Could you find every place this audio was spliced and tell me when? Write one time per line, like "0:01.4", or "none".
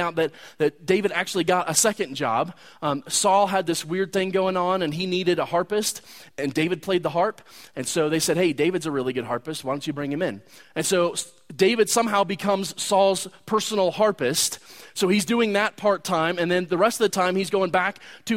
none